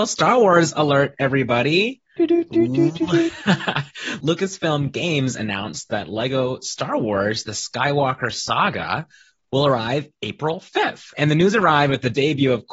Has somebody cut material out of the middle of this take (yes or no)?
no